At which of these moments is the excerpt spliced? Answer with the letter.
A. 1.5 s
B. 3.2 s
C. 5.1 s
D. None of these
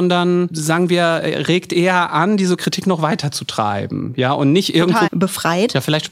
C